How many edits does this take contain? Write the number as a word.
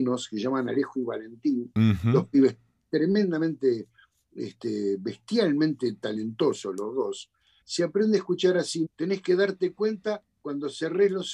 two